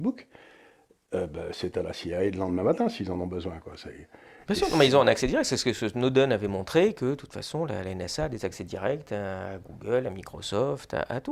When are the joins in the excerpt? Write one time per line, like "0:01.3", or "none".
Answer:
none